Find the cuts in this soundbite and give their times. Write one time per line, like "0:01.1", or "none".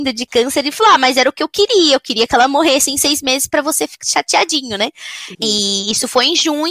0:04.0
0:05.3